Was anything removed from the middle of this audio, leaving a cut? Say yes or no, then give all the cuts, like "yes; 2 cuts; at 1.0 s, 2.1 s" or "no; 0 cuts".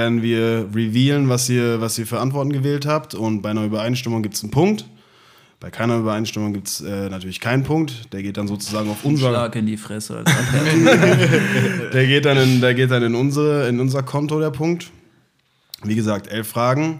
no; 0 cuts